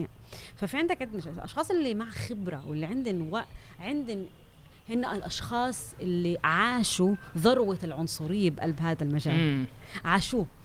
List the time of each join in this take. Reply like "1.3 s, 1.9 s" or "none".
none